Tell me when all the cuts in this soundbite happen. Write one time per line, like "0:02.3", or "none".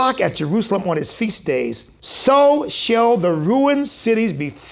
0:02.0